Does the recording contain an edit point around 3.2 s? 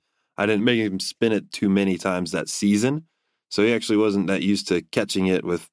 no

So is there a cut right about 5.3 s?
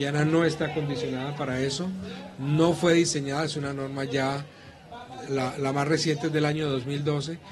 yes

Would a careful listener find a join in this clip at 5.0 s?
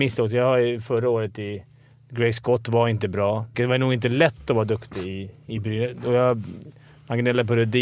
no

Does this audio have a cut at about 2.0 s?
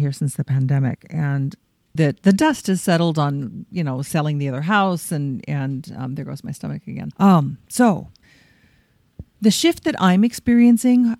yes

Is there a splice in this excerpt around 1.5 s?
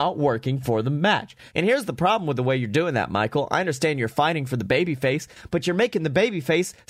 yes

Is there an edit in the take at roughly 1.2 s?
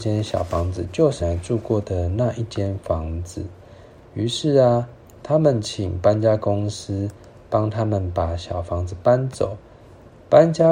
yes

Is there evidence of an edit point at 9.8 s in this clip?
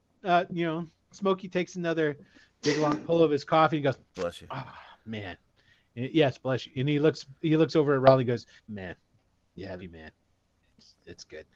yes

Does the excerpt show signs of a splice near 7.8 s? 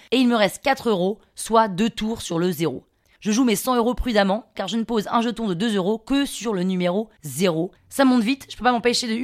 yes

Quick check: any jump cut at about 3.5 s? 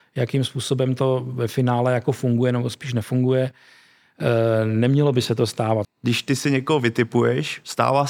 no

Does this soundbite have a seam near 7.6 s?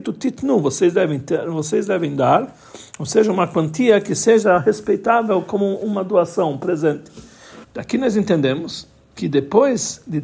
yes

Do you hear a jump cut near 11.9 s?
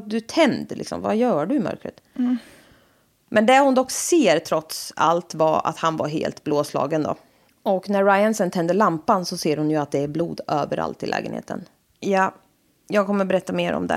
yes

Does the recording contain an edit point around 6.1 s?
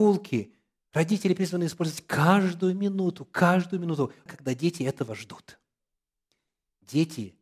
no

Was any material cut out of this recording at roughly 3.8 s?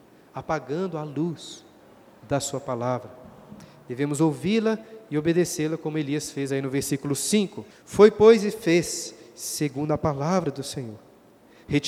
no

